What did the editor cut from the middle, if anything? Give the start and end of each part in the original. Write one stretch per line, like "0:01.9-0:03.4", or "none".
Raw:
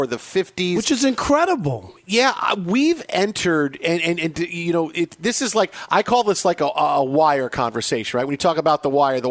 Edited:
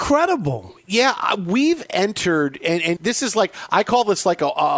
0:04.2-0:05.2